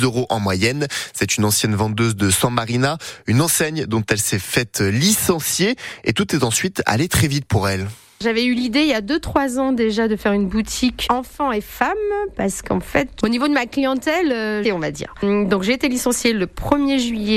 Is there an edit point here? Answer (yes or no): yes